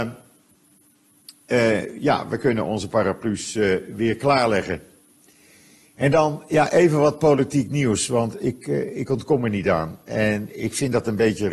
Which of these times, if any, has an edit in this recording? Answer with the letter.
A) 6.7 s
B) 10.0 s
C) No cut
C